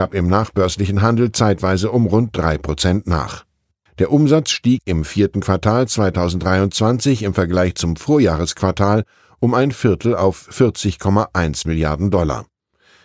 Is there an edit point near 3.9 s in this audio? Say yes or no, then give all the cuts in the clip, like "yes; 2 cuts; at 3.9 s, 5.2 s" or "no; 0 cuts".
yes; 1 cut; at 3.9 s